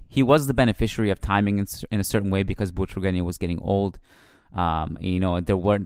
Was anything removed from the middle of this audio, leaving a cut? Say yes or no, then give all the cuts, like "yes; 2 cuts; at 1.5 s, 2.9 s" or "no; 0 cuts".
no; 0 cuts